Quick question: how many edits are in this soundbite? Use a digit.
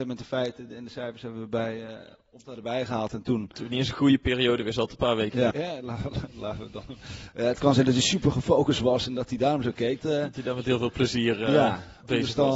2